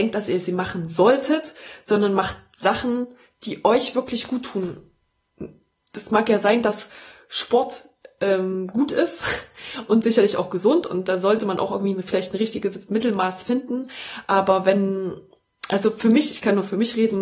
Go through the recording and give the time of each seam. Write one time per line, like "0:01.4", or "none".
none

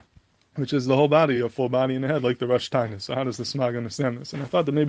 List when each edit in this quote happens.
none

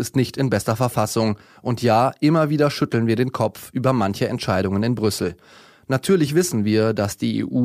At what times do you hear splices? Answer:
none

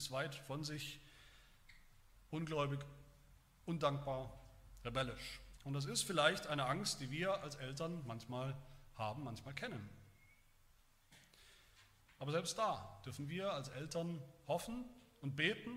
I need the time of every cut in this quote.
0:05.6

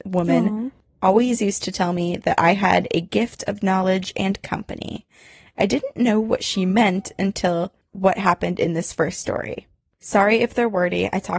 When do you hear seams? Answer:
none

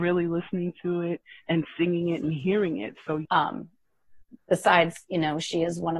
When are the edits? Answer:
0:03.3

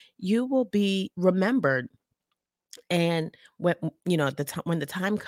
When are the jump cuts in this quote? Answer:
none

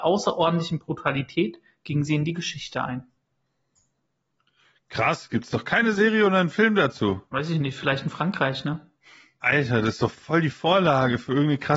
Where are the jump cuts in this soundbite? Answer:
0:07.3

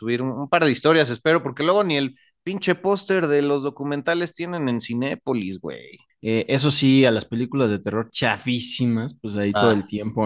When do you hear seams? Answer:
0:06.1

